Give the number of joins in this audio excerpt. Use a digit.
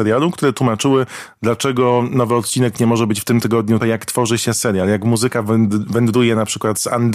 1